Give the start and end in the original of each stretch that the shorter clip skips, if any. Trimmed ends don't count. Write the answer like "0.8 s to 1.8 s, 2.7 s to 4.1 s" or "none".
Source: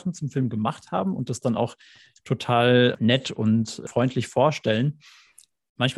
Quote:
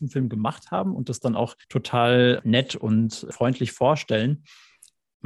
1.8 s to 2.2 s